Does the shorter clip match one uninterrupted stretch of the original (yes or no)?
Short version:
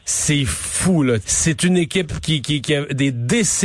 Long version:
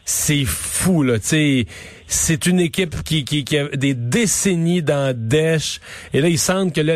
no